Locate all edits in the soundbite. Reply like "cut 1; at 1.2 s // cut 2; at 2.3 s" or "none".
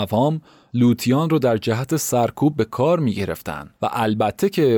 cut 1; at 3.7 s